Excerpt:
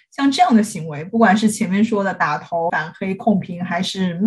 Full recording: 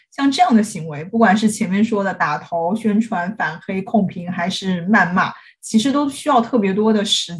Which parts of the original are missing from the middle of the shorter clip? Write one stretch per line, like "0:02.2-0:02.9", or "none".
0:02.7-0:03.4